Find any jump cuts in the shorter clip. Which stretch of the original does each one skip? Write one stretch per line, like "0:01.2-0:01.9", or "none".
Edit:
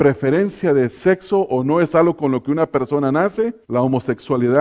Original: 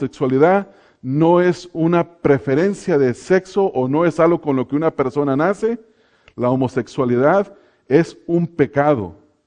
0:05.9-0:06.3